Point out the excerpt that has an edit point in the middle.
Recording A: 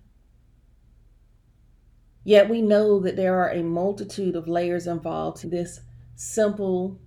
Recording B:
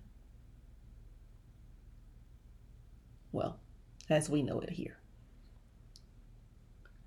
A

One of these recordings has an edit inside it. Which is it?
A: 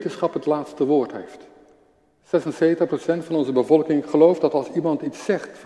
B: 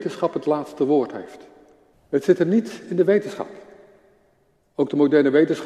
B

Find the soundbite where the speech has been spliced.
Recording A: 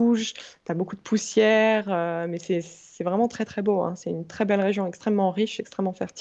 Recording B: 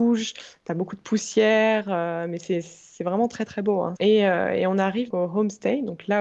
B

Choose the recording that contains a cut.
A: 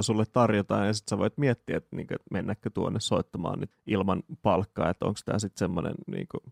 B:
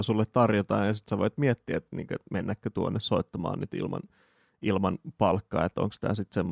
A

